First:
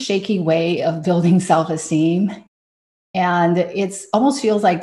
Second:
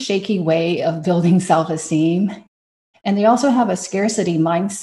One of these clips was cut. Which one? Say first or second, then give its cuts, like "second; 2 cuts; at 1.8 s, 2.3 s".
second; 1 cut; at 2.9 s